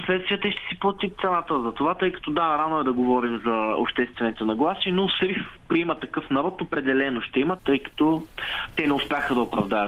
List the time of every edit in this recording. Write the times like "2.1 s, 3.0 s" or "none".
5.2 s, 7.6 s